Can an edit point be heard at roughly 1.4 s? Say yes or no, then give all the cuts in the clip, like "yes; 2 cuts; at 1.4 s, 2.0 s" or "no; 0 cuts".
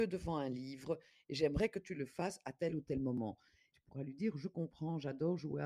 no; 1 cut; at 3.7 s